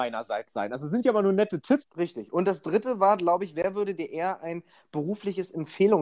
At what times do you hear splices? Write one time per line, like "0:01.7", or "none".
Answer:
0:01.8